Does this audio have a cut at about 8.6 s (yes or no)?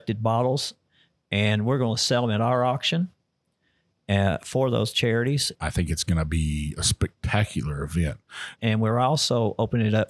yes